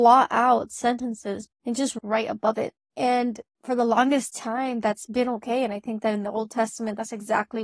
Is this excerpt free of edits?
no; 2 cuts; at 1.5 s, 2.8 s

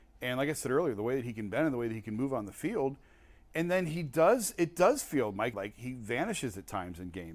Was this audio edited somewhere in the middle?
yes; 1 cut; at 5.5 s

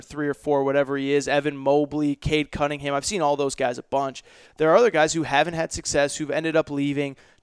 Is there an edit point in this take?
yes; 1 cut; at 4.5 s

